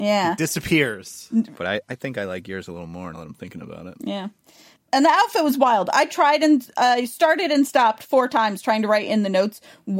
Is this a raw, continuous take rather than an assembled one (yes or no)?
no